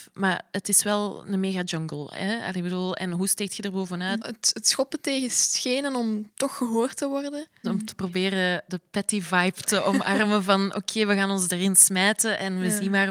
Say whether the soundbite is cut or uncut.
cut